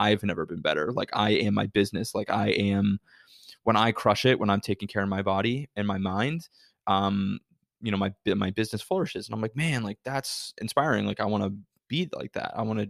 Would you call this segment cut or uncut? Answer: uncut